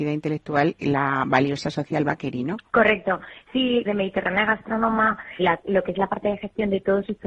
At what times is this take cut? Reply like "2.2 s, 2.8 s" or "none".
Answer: 2.7 s, 3.9 s, 5.4 s